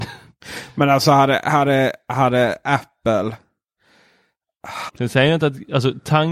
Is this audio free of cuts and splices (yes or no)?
no